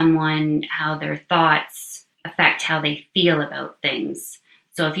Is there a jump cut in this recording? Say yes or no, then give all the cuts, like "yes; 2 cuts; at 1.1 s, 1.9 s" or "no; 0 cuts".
yes; 1 cut; at 2.1 s